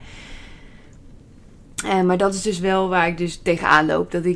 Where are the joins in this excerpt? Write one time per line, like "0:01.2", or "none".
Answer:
none